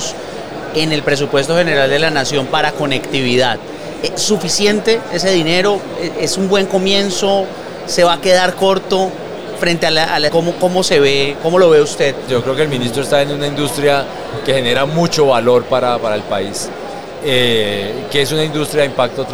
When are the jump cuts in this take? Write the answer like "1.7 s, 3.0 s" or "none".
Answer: 10.3 s, 12.3 s